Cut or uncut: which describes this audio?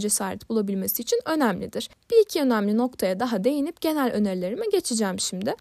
uncut